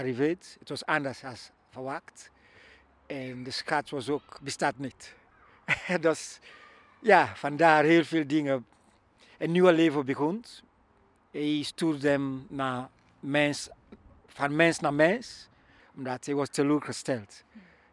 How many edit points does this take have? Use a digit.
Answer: 2